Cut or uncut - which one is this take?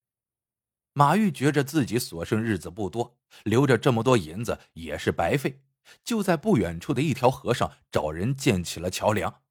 uncut